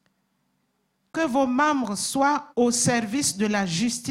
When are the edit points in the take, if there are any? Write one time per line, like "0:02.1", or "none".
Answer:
0:02.5